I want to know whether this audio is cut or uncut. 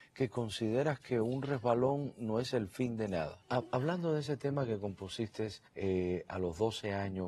cut